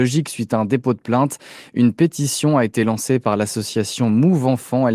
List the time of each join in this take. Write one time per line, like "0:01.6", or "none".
none